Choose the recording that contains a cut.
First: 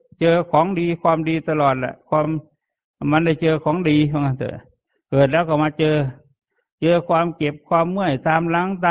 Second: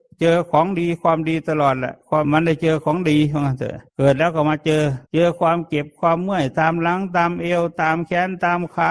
second; 3 cuts; at 2.2 s, 3.9 s, 5.0 s

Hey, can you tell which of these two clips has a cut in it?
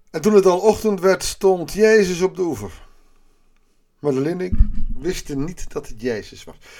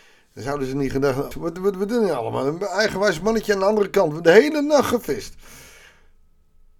second; 1 cut; at 1.3 s

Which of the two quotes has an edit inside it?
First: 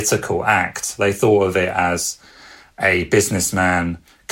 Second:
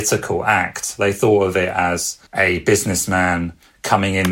second; 1 cut; at 2.3 s

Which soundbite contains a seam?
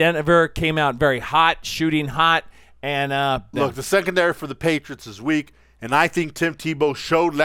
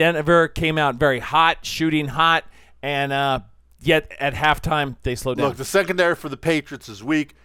first; 1 cut; at 3.5 s

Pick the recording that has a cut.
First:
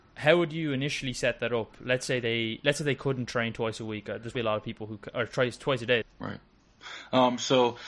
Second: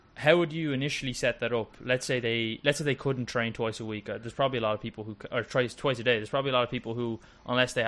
first; 2 cuts; at 4.3 s, 6.0 s

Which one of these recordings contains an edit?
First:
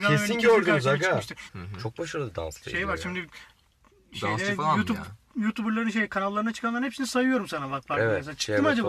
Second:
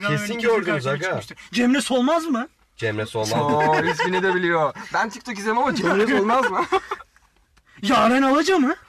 first; 1 cut; at 1.5 s

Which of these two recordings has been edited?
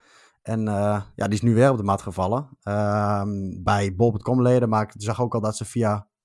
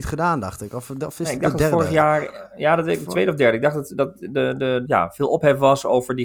second; 1 cut; at 4.8 s

